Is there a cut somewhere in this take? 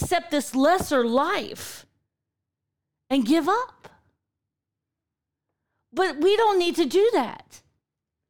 no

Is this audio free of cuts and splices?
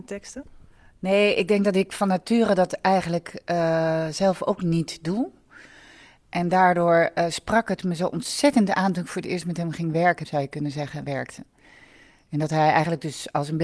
no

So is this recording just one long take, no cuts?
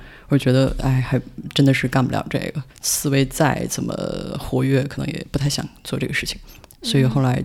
no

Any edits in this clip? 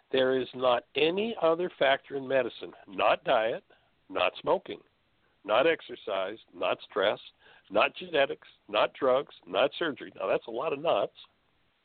no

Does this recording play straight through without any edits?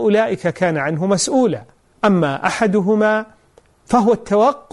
no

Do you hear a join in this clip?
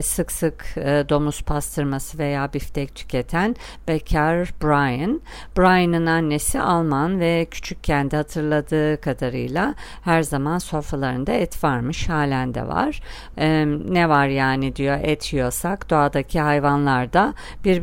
yes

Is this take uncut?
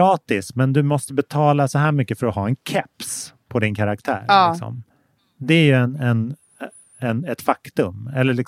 yes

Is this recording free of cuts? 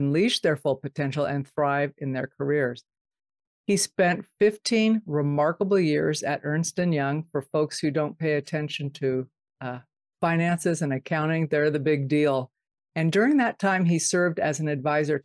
no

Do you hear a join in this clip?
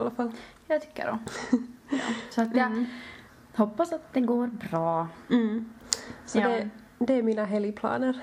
no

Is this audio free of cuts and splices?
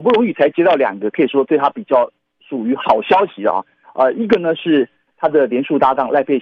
yes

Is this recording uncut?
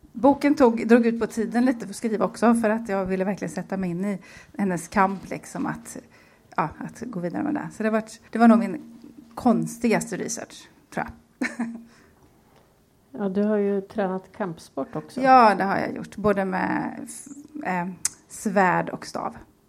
no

